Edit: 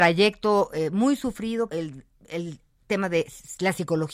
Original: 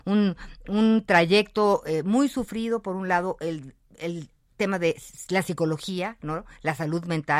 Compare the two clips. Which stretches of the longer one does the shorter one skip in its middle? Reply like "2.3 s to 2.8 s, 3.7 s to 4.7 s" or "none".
2.8 s to 3.4 s